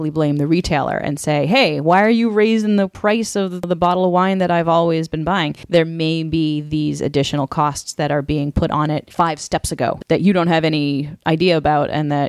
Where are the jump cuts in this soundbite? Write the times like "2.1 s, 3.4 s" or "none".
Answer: 5.7 s